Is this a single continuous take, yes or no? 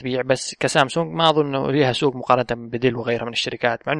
yes